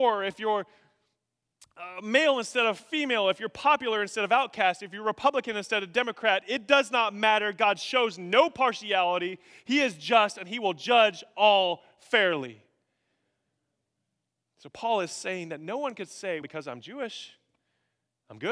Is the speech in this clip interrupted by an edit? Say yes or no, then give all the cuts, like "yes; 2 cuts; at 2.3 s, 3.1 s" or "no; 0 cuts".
yes; 1 cut; at 16.4 s